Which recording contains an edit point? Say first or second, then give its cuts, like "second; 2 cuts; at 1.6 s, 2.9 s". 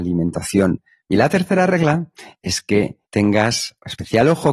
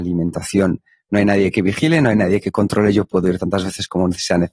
first; 2 cuts; at 1.0 s, 3.0 s